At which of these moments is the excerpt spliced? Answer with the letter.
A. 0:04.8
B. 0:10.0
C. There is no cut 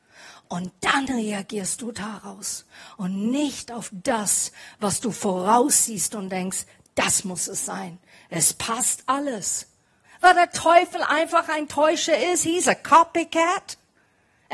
B